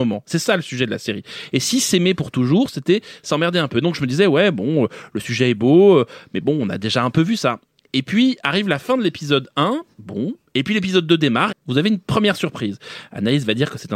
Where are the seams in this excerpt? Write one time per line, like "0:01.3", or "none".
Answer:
0:09.9
0:11.5